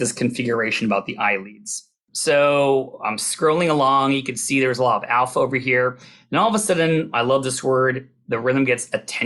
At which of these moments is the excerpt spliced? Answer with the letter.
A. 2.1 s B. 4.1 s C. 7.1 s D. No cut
A